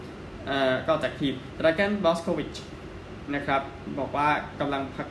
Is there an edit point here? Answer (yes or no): no